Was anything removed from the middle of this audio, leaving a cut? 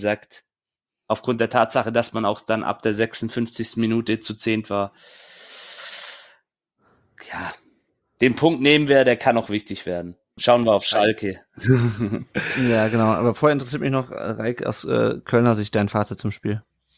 yes; 1 cut; at 10.4 s

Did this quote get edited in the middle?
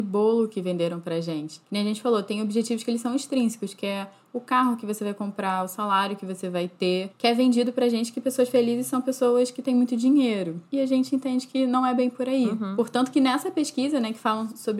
no; 0 cuts

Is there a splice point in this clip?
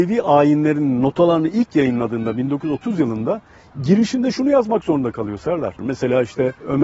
yes; 1 cut; at 5.8 s

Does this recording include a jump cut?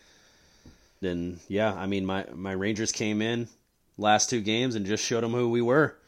yes; 1 cut; at 1.0 s

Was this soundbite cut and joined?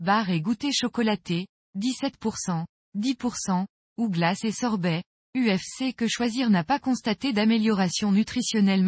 yes; 2 cuts; at 2.8 s, 5.1 s

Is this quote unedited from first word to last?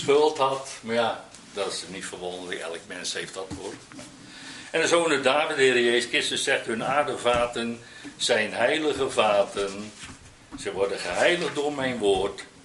yes; 0 cuts

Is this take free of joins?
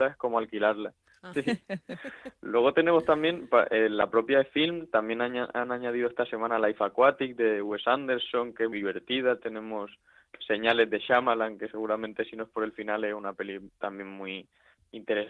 no; 2 cuts; at 1.3 s, 8.7 s

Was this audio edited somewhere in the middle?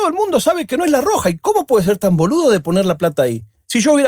no; 0 cuts

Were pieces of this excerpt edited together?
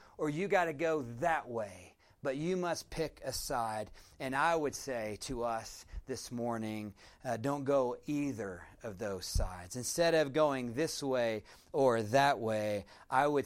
no; 0 cuts

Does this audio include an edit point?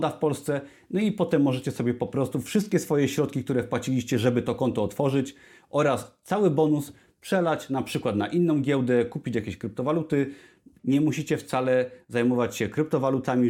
yes; 1 cut; at 10.8 s

